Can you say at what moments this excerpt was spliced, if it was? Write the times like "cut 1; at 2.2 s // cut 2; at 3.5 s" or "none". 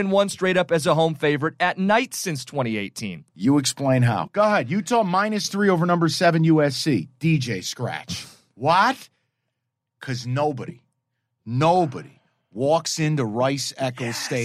cut 1; at 3.3 s